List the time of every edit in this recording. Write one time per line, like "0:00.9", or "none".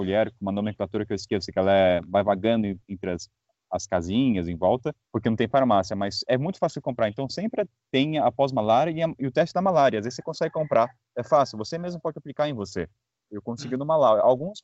0:05.0